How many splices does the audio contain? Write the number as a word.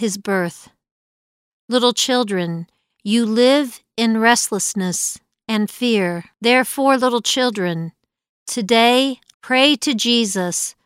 two